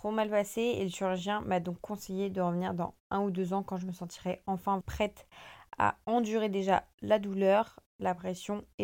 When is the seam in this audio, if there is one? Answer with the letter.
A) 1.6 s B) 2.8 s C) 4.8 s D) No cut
C